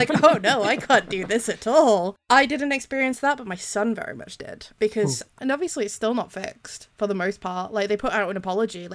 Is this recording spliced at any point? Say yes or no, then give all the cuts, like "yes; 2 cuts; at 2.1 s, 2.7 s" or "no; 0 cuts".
yes; 1 cut; at 5.3 s